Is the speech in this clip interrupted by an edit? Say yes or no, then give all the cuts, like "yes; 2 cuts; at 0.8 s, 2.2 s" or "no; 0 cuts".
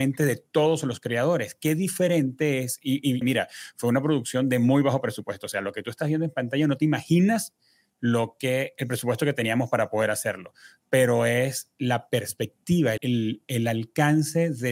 yes; 2 cuts; at 3.2 s, 13.0 s